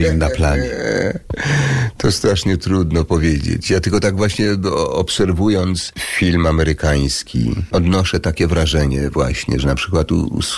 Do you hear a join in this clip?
no; 0 cuts

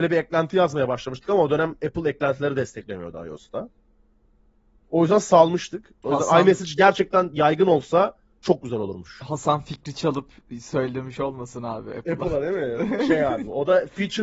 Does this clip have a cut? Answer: yes; 1 cut; at 6.0 s

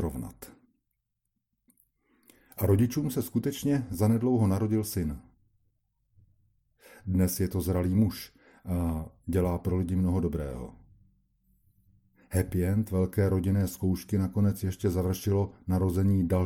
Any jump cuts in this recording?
no; 0 cuts

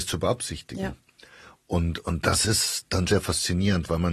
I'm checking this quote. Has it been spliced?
yes; 1 cut; at 3.1 s

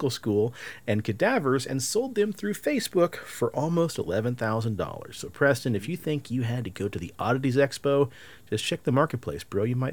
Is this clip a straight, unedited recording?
yes; 0 cuts

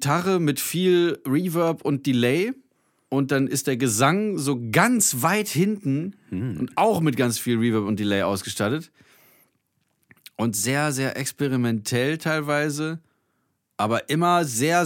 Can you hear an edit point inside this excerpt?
no; 0 cuts

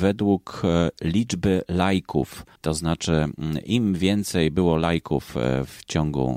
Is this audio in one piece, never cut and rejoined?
no; 1 cut; at 2.6 s

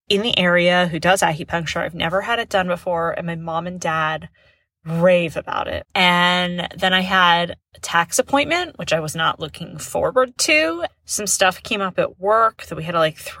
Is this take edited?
yes; 2 cuts; at 5.8 s, 10.9 s

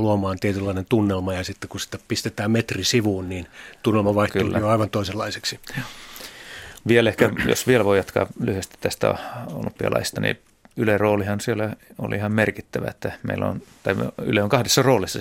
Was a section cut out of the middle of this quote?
no; 0 cuts

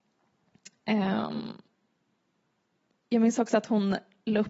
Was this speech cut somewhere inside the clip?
no; 0 cuts

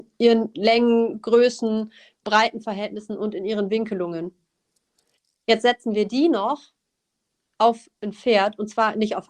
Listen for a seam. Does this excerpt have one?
yes; 1 cut; at 8.0 s

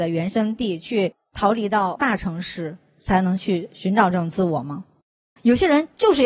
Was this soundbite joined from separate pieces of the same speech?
yes; 1 cut; at 5.4 s

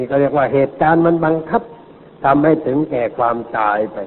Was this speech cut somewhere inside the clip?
no; 0 cuts

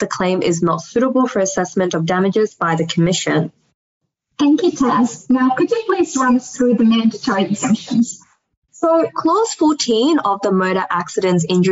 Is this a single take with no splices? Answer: no; 1 cut; at 8.7 s

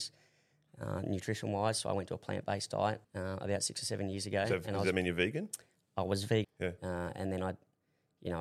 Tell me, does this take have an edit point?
yes; 2 cuts; at 3.0 s, 6.4 s

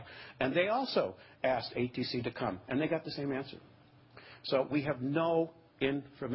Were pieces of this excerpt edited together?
no; 0 cuts

